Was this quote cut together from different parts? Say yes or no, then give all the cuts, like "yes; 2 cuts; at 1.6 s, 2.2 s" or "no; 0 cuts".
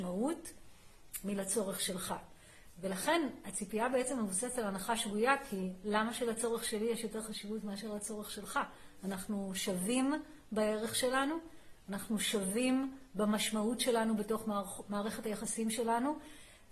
no; 0 cuts